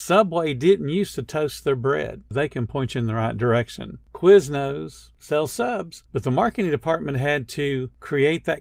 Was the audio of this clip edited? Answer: yes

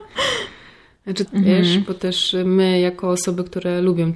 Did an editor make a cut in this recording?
yes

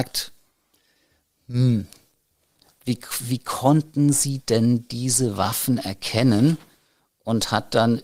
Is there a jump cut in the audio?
no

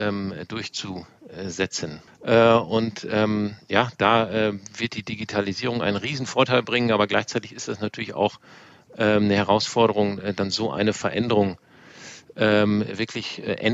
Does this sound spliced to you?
yes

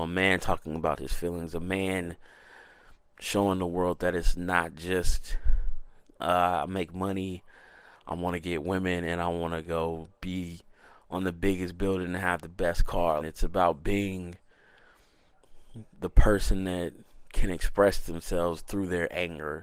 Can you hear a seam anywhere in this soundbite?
yes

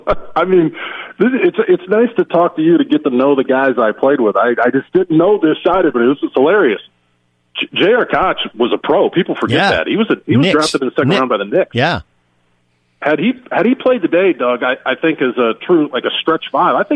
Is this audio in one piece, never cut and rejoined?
yes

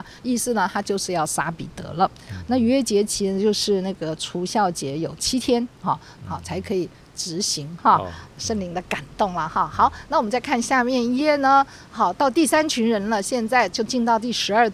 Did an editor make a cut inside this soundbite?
yes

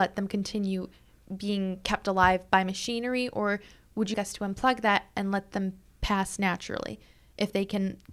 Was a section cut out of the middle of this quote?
yes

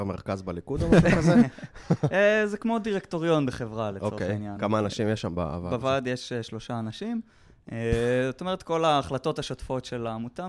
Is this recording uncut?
yes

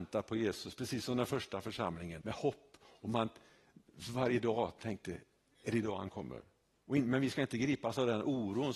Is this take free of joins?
no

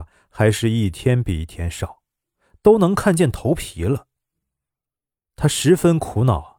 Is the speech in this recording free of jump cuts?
yes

